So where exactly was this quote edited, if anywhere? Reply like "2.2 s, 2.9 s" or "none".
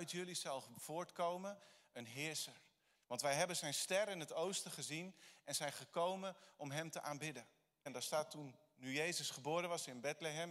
2.9 s, 7.9 s